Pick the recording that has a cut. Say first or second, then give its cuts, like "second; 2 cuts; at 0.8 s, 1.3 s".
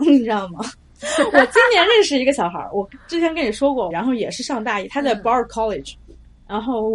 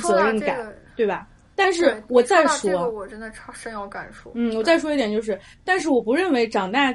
first; 1 cut; at 3.9 s